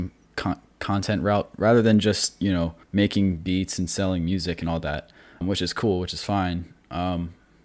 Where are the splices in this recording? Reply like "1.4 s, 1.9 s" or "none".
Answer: 2.8 s, 5.4 s